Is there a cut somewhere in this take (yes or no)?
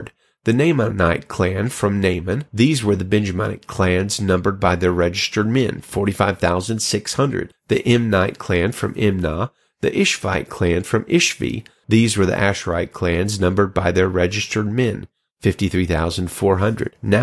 yes